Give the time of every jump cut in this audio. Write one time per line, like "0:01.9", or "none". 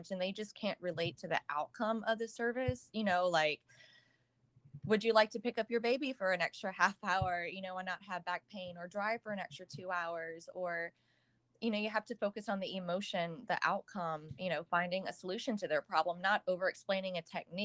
none

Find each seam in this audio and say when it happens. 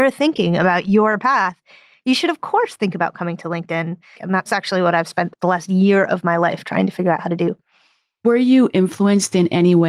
0:04.1
0:05.3

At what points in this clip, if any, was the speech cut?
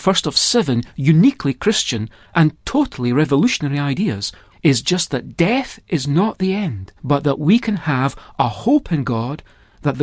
0:04.5
0:07.0

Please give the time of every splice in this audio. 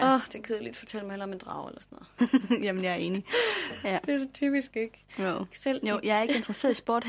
0:02.2
0:05.5

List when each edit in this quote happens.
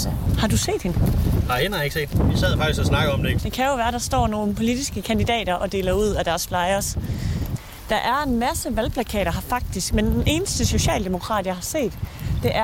0:03.4

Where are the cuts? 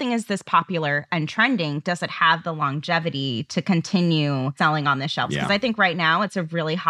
none

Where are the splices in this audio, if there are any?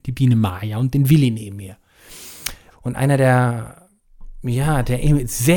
0:02.7

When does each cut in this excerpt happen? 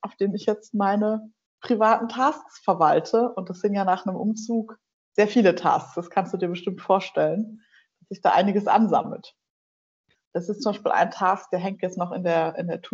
0:10.1

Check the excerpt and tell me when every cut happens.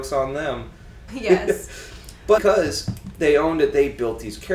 0:01.1
0:02.4

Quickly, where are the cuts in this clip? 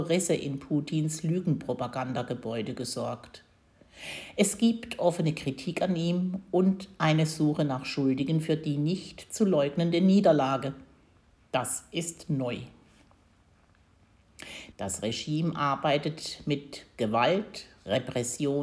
0:14.7

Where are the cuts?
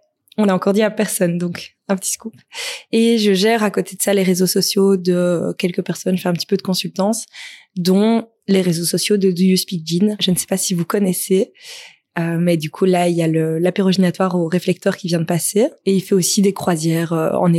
none

